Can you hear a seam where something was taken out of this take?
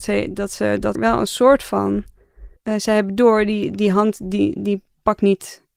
yes; 2 cuts; at 0.9 s, 2.6 s

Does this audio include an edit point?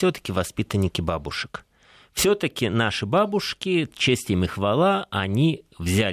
no; 0 cuts

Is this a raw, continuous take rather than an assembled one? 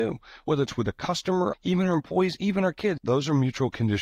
no; 2 cuts; at 1.5 s, 3.0 s

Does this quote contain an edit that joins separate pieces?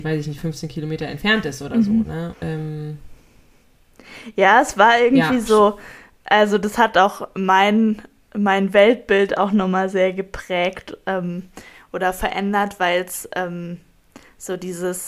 yes; 1 cut; at 2.3 s

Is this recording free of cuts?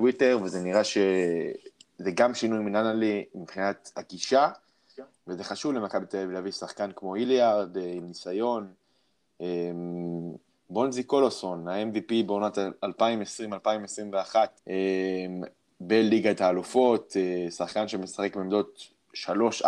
no; 2 cuts; at 10.5 s, 14.6 s

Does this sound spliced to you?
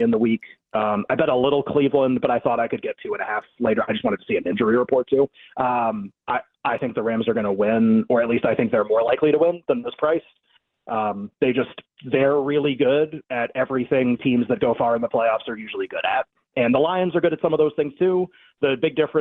no; 0 cuts

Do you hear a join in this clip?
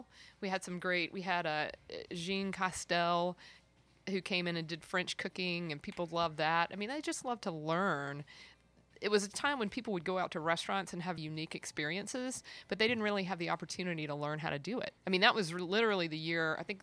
yes; 2 cuts; at 11.2 s, 15.0 s

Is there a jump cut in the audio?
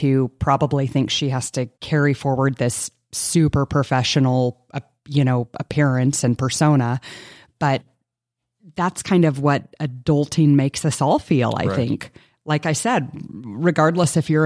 yes; 1 cut; at 1.7 s

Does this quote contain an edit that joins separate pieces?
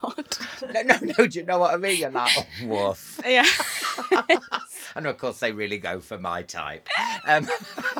no; 0 cuts

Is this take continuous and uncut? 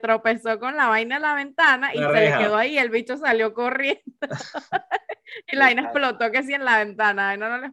yes; 0 cuts

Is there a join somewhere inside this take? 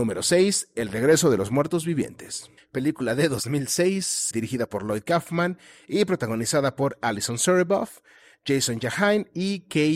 yes; 2 cuts; at 2.6 s, 4.3 s

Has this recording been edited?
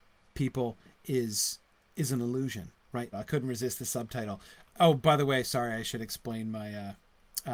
yes; 2 cuts; at 3.1 s, 4.6 s

